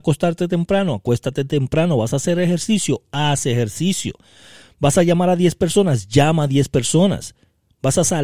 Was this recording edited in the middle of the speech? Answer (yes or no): no